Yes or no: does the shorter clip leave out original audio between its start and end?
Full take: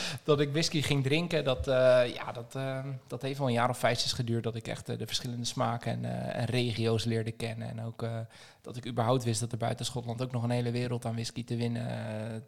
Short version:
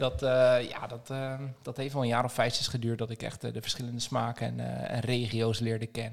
no